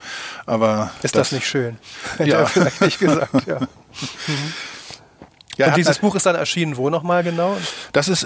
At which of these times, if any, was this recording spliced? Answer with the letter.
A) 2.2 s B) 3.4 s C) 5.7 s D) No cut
D